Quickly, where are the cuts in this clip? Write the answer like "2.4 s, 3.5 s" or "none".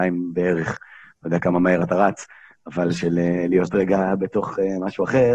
none